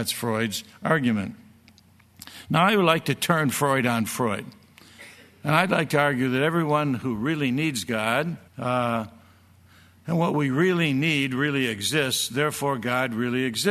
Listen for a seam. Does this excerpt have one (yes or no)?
yes